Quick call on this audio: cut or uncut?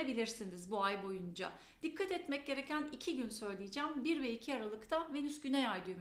uncut